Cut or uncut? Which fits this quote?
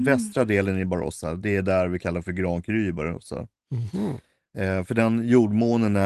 uncut